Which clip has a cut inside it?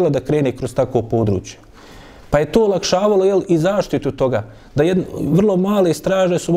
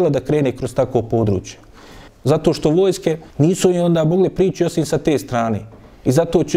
second; 2 cuts; at 2.1 s, 3.3 s

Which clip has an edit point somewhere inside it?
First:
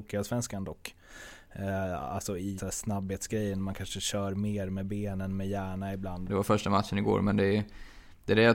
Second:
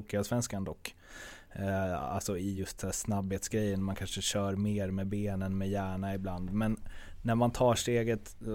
first; 2 cuts; at 2.6 s, 6.3 s

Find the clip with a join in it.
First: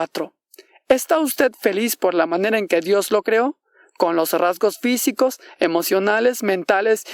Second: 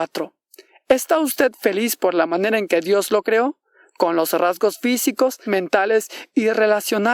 second; 1 cut; at 5.5 s

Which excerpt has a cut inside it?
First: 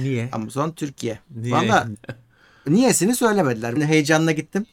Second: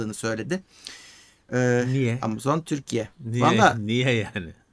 first; 2 cuts; at 1.9 s, 3.8 s

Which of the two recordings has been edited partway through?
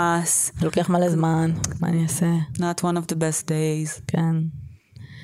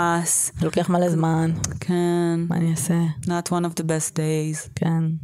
first; 1 cut; at 1.8 s

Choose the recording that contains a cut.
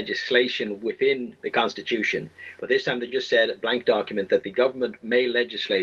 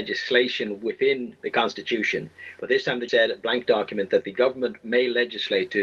second; 1 cut; at 3.1 s

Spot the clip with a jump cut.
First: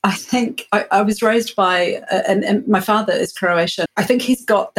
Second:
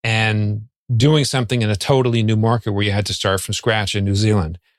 first; 1 cut; at 3.9 s

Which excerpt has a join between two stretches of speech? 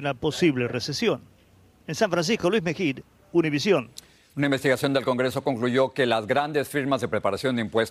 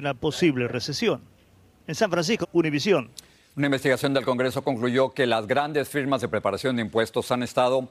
second; 1 cut; at 2.4 s

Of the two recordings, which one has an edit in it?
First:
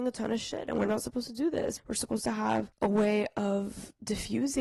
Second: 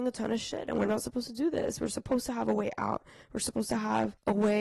first; 1 cut; at 1.8 s

